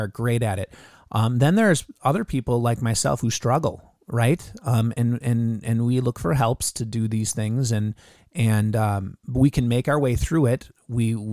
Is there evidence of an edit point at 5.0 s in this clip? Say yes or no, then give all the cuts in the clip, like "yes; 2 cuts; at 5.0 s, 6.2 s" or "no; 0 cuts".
no; 0 cuts